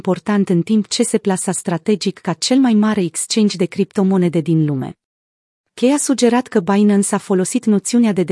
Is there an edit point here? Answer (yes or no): yes